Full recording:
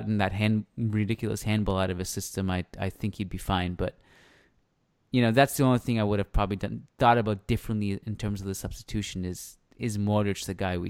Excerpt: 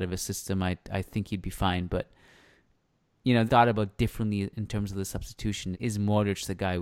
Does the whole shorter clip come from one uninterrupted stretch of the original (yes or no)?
no